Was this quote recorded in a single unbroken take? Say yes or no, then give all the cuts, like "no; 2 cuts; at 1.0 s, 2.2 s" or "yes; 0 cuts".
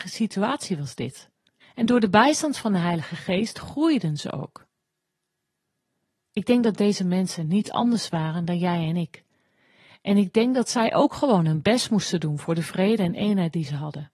no; 1 cut; at 1.6 s